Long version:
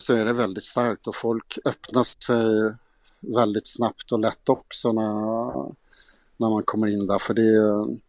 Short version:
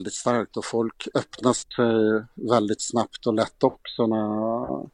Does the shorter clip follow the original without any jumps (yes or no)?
no